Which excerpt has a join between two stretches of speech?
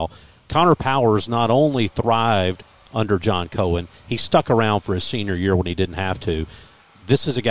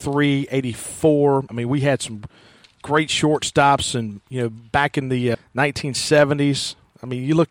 second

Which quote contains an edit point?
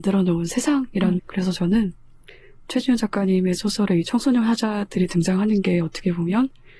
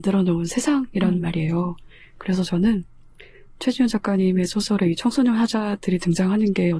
first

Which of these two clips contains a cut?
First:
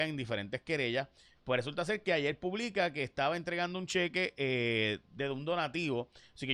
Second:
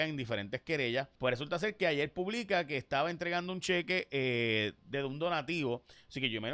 second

